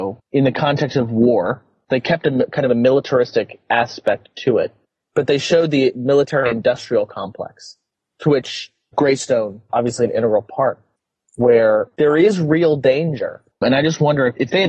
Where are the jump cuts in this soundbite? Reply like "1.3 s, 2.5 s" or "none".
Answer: 13.5 s